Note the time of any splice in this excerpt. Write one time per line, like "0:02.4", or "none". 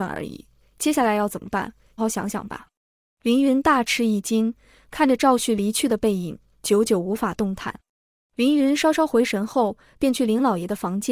0:02.0